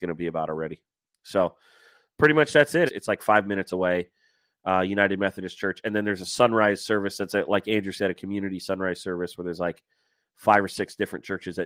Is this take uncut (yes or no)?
no